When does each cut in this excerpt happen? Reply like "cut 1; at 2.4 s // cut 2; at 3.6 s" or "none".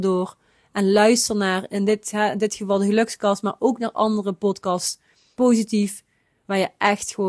cut 1; at 5.3 s